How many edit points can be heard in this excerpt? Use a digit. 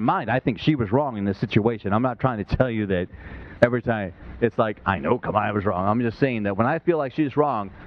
0